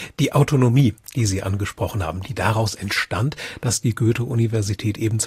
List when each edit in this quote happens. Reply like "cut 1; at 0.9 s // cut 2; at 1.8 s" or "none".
none